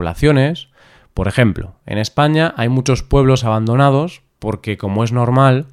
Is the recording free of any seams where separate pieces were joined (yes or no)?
yes